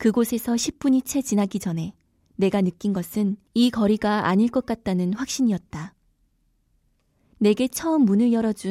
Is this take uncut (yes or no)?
yes